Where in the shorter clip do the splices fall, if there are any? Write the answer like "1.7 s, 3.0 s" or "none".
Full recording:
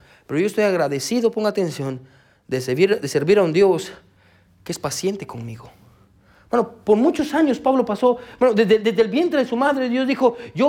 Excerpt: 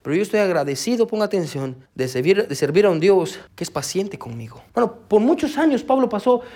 1.9 s, 3.5 s, 4.7 s